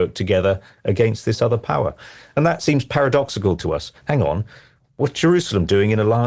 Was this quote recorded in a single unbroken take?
yes; 0 cuts

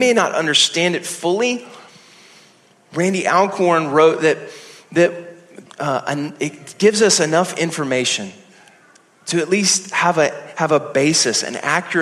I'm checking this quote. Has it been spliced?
yes; 1 cut; at 5.7 s

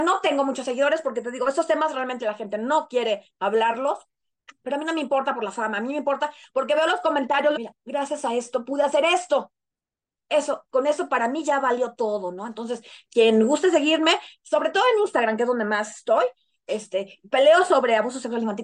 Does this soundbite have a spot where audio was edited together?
yes; 1 cut; at 7.5 s

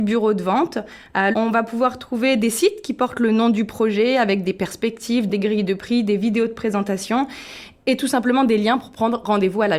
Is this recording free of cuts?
no; 2 cuts; at 1.3 s, 5.3 s

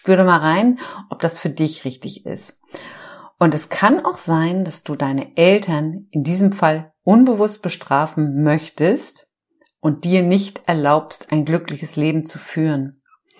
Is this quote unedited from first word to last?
no; 1 cut; at 11.3 s

